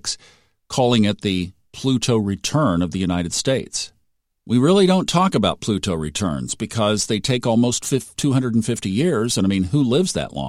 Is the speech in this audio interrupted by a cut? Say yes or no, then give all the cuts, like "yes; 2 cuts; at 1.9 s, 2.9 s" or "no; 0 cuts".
no; 0 cuts